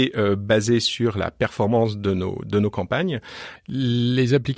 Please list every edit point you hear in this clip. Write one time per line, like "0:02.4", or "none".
0:03.6